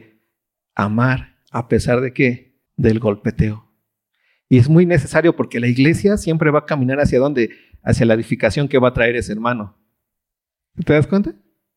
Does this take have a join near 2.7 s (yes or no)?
yes